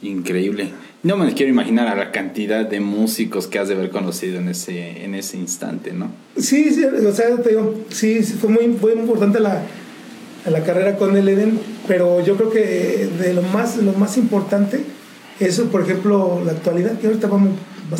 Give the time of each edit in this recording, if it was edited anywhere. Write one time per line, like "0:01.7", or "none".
none